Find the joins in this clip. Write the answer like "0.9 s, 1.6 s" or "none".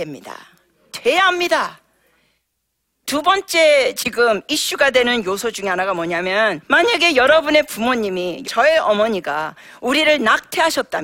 3.0 s, 6.6 s, 8.4 s